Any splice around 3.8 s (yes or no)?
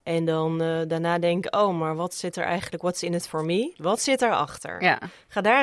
yes